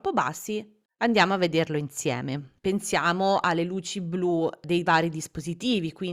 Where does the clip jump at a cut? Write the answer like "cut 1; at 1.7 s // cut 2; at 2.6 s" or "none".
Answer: cut 1; at 2.6 s